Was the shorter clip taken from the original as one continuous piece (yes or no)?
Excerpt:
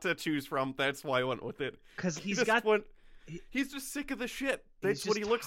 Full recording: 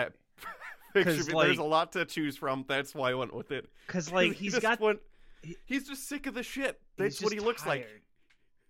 no